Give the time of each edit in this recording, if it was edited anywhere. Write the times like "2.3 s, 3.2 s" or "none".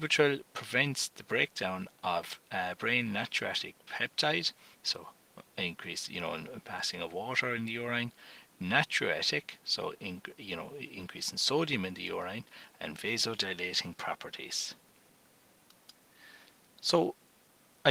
4.7 s, 16.7 s